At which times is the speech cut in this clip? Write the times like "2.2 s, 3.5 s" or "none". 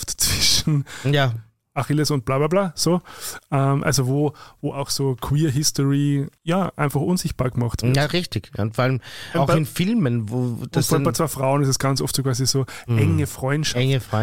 6.4 s, 9.3 s